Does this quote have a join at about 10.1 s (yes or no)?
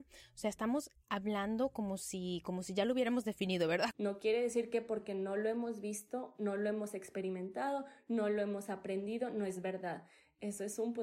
no